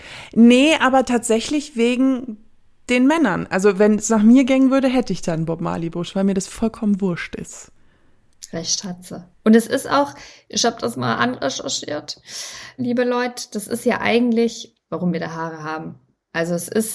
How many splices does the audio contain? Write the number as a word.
three